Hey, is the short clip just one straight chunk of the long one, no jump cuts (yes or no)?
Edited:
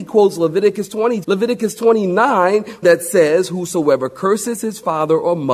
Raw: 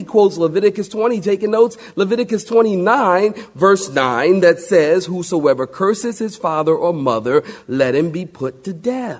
no